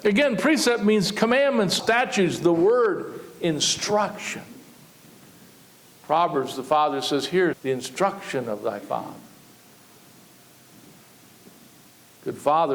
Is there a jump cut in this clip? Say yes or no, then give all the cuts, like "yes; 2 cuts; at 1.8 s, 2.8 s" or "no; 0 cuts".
yes; 2 cuts; at 1.8 s, 7.5 s